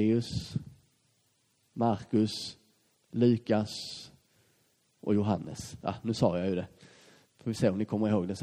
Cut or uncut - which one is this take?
uncut